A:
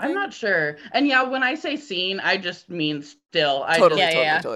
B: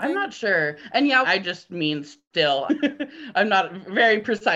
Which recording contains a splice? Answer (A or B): B